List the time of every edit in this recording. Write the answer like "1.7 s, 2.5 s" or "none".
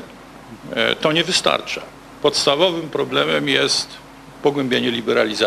none